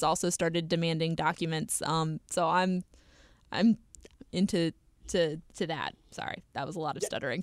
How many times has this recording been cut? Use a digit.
1